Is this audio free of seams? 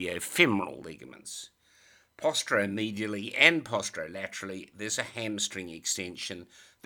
yes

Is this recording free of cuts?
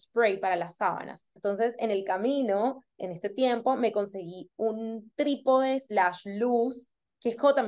no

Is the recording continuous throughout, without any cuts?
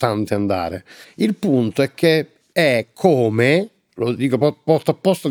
no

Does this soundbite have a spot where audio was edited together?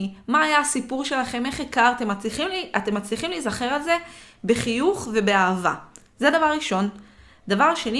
no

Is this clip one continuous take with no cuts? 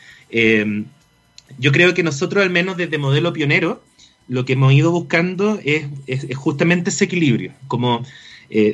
yes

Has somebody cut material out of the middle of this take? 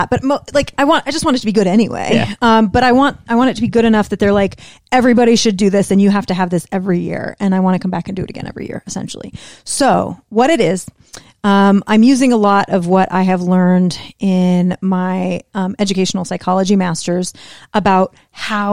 no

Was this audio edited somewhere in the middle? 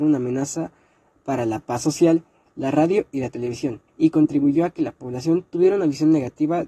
yes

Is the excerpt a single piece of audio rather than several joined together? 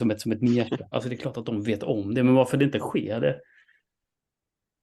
no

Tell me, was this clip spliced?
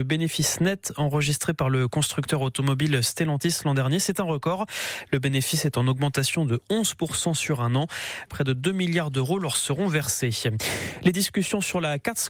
yes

